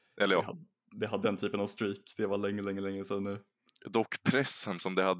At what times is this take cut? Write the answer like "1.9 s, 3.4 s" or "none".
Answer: 1.2 s